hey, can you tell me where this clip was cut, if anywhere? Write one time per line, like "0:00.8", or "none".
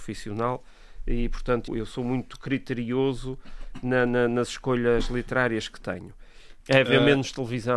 0:01.7
0:06.6